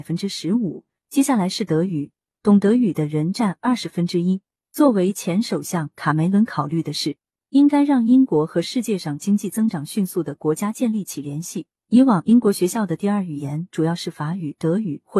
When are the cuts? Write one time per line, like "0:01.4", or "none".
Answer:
0:04.6
0:11.8